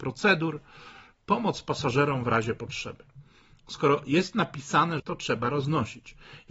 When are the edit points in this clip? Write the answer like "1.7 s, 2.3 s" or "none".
5.0 s